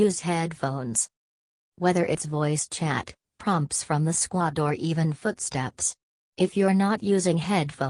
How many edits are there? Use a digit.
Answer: 1